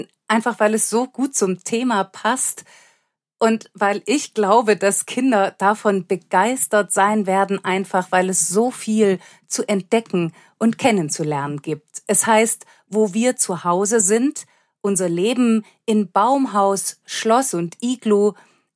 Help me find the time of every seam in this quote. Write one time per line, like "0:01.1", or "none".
none